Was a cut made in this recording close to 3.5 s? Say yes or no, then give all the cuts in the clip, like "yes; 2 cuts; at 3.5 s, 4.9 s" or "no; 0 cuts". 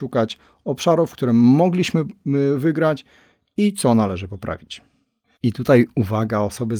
no; 1 cut; at 5.4 s